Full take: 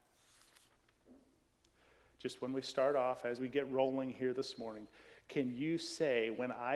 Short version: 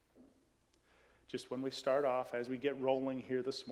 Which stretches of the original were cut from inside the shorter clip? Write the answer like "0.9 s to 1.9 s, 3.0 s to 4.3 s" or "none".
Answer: none